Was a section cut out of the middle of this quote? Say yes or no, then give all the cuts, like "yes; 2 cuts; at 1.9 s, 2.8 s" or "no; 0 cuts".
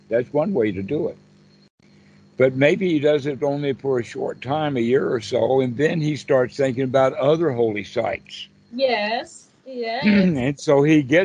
no; 0 cuts